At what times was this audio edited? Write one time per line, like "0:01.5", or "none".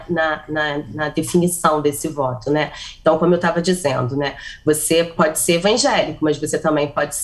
none